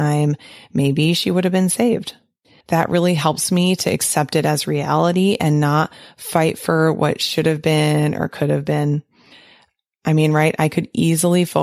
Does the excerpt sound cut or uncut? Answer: cut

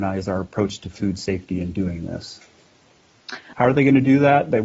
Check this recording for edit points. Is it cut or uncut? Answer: cut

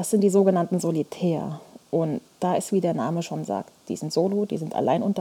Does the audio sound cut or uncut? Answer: uncut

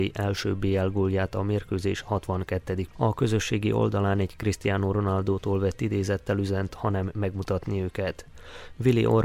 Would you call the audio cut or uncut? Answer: cut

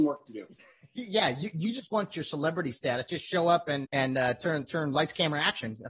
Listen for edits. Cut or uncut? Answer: cut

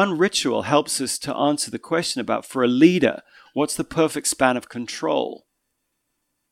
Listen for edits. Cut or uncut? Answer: uncut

